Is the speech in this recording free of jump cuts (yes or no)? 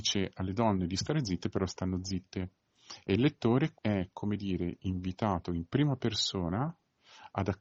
no